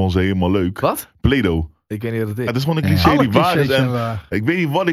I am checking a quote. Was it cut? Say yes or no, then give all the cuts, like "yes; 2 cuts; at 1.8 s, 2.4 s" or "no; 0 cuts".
yes; 1 cut; at 2.5 s